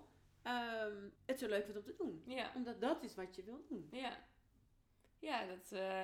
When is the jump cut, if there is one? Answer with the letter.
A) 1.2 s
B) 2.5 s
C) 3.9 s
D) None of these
A